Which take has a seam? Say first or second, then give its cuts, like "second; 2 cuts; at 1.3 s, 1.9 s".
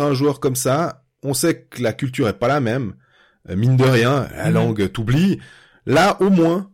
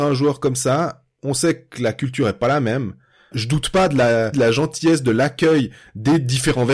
second; 2 cuts; at 3.3 s, 4.3 s